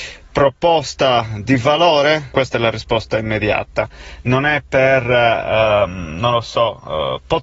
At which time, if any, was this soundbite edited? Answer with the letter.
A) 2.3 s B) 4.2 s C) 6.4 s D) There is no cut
A